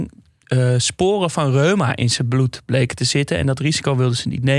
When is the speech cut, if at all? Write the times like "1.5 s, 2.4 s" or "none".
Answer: none